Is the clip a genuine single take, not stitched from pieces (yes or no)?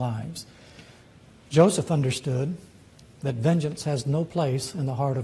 yes